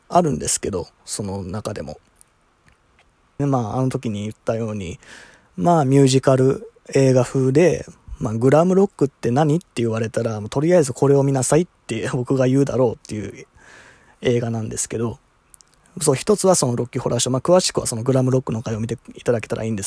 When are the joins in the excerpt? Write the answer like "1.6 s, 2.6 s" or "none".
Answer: 3.4 s